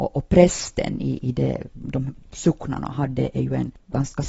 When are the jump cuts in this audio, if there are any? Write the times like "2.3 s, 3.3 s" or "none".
none

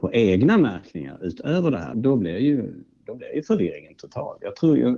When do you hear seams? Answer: 1.9 s

